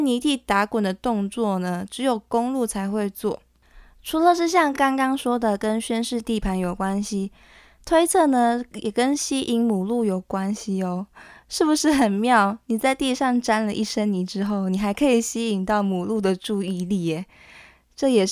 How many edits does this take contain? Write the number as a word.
zero